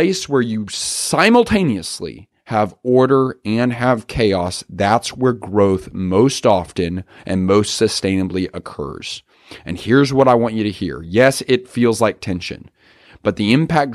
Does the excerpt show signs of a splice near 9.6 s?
no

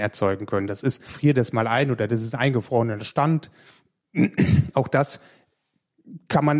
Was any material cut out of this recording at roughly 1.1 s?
yes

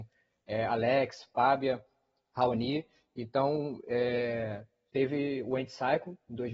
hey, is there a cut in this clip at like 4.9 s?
yes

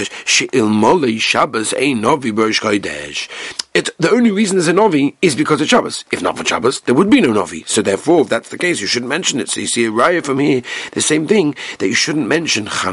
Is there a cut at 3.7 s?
no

